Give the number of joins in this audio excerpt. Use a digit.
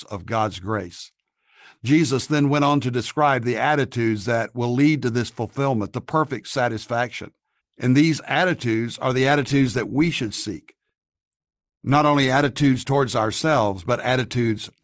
1